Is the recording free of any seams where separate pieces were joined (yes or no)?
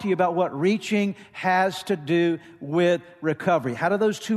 yes